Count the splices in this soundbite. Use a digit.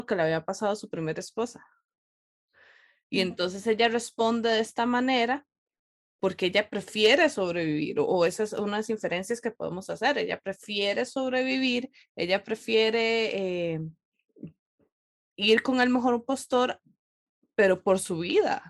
0